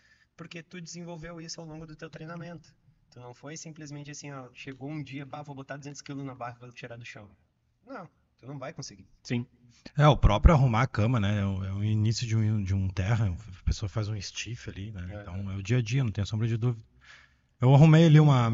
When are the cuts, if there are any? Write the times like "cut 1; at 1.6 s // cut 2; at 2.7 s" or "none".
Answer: none